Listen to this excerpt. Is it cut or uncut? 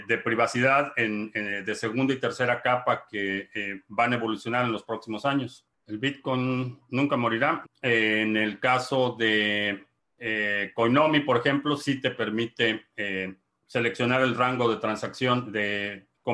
cut